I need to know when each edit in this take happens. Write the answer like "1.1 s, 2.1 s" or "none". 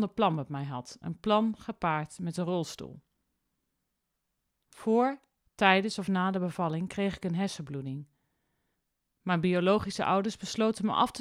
4.6 s